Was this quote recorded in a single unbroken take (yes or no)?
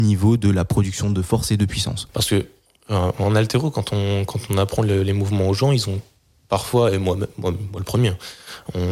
no